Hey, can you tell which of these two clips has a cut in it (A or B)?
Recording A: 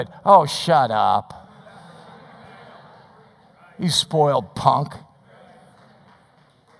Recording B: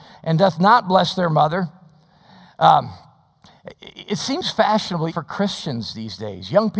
B